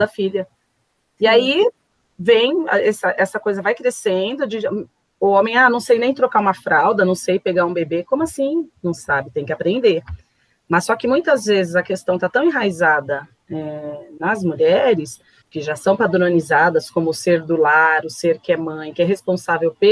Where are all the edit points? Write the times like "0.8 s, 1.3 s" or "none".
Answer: 15.4 s